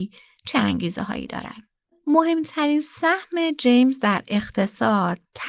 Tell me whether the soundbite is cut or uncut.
uncut